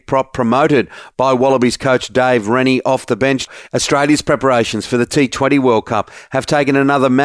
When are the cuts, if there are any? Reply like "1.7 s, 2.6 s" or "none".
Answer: 3.6 s